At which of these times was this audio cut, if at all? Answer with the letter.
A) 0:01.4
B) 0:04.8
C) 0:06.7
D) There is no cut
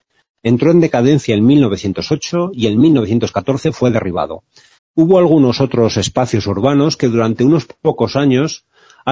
B